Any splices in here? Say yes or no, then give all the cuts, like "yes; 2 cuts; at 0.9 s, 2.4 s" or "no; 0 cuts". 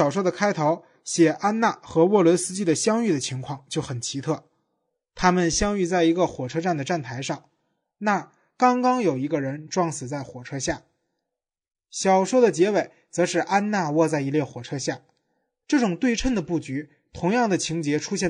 no; 0 cuts